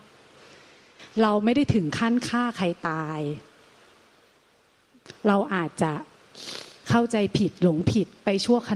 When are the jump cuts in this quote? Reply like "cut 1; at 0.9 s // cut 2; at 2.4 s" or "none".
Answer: none